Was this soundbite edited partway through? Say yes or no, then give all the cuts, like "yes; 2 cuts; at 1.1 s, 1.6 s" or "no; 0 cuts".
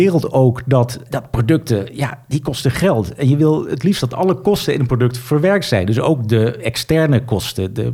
yes; 1 cut; at 1.1 s